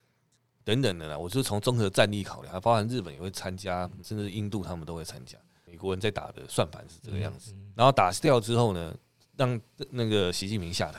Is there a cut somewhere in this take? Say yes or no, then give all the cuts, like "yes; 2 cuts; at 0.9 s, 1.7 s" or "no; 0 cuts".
yes; 2 cuts; at 4.0 s, 5.7 s